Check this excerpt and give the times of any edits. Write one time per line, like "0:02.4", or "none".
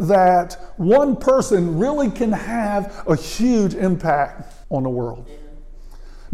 0:04.6